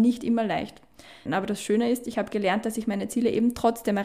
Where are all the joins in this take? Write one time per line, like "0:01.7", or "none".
0:01.3